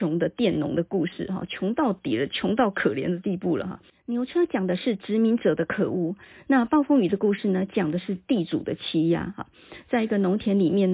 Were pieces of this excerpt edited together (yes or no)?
no